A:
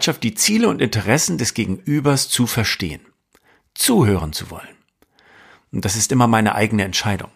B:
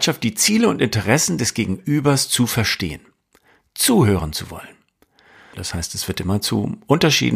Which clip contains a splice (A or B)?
B